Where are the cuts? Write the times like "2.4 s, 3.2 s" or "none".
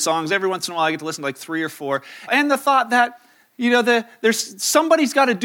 2.3 s